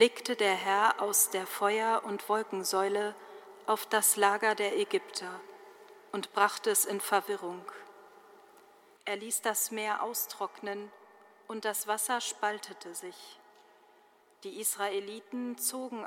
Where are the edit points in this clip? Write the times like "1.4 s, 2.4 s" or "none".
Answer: 9.0 s